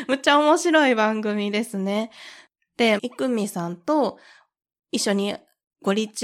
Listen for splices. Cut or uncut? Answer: cut